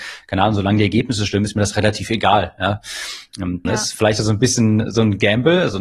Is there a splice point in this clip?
yes; 1 cut; at 3.7 s

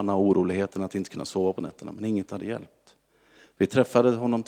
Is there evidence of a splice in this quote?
no; 0 cuts

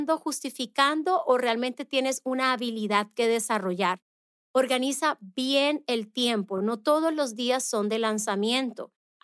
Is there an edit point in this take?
no; 0 cuts

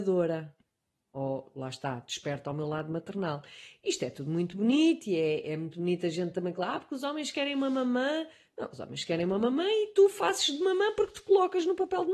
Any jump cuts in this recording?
no; 0 cuts

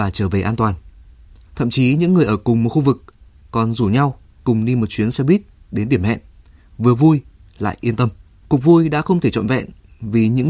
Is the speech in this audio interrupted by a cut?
yes; 2 cuts; at 1.5 s, 8.4 s

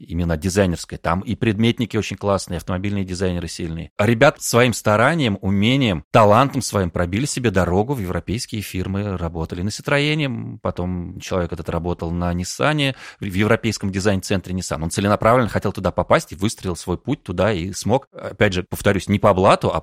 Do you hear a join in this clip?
yes; 1 cut; at 4.3 s

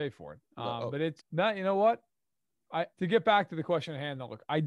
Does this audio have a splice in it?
yes; 2 cuts; at 1.2 s, 2.9 s

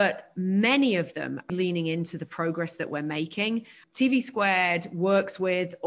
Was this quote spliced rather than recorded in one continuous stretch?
yes; 2 cuts; at 1.5 s, 3.8 s

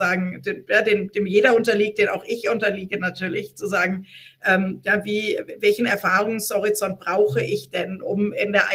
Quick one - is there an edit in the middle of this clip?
no; 0 cuts

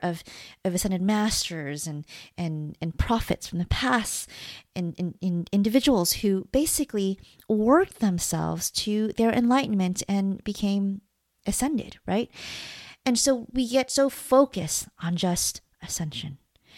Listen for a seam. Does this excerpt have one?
no; 0 cuts

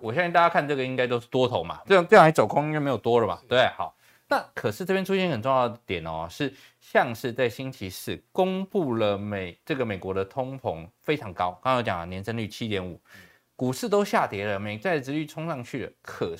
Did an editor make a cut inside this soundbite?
yes; 1 cut; at 1.9 s

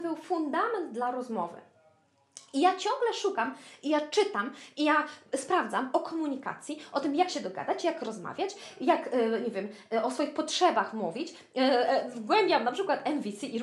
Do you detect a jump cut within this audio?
no; 0 cuts

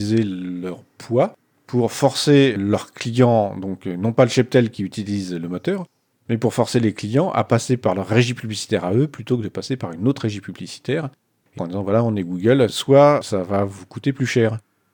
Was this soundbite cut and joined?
yes; 2 cuts; at 11.6 s, 12.7 s

